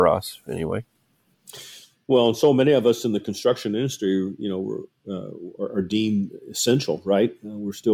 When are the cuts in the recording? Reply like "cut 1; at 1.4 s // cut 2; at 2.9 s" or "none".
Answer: none